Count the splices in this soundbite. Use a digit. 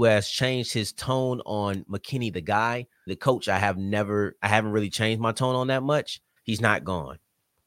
2